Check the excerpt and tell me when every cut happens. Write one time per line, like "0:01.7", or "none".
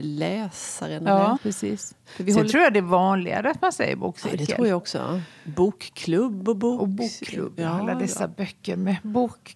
0:01.4